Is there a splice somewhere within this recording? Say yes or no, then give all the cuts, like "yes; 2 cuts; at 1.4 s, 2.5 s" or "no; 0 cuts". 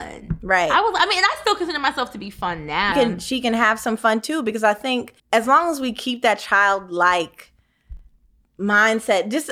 yes; 2 cuts; at 2.9 s, 5.2 s